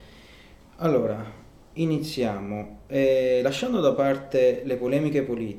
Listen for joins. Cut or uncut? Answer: uncut